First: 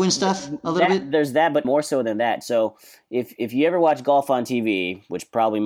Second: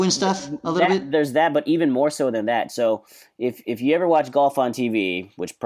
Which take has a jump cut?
first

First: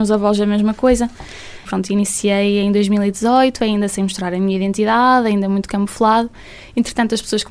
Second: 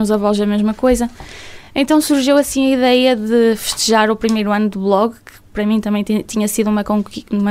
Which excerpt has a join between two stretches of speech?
first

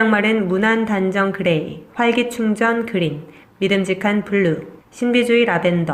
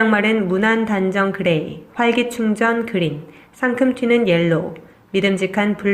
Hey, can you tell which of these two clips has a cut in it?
first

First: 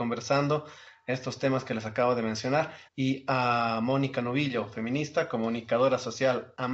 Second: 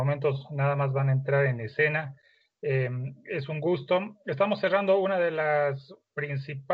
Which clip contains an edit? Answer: first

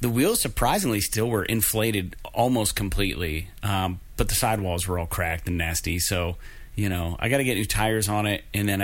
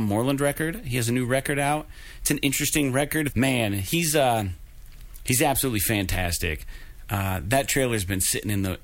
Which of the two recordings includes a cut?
second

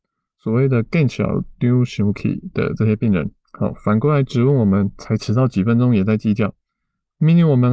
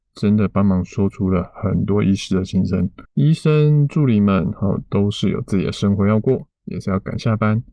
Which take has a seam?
second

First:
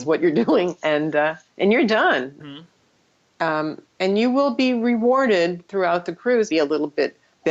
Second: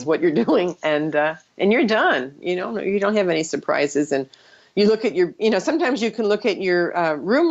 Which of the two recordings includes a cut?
first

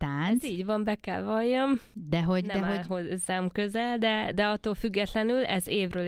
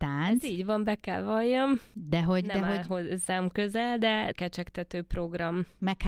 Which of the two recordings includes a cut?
second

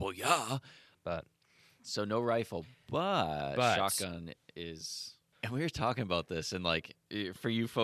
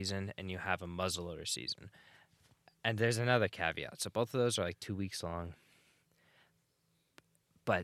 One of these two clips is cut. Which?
first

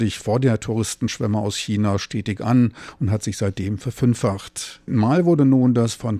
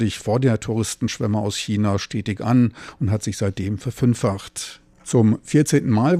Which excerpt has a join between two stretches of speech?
first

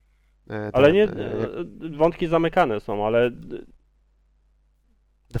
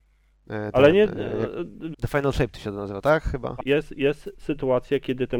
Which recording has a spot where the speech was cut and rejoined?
second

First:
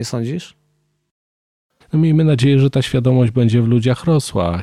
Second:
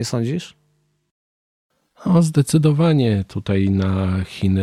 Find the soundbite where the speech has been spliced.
first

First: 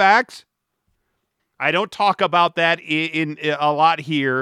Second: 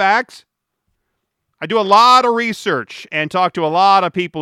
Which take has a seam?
first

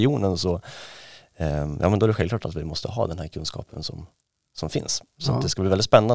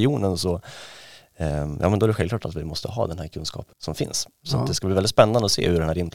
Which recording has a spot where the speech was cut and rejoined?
second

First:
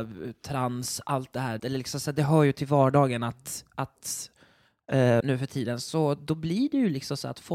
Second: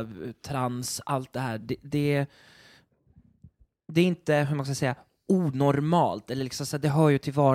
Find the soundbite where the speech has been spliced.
first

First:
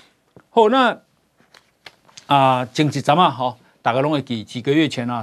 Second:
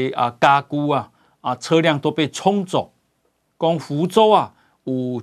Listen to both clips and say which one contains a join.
second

